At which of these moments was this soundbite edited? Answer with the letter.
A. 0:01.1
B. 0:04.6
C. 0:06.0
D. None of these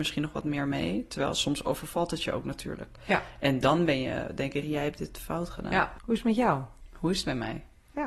B